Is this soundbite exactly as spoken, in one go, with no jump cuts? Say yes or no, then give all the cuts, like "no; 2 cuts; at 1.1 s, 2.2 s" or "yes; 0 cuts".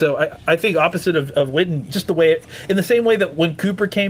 no; 1 cut; at 1.9 s